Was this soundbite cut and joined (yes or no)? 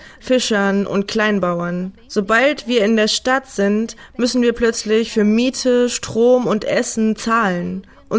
no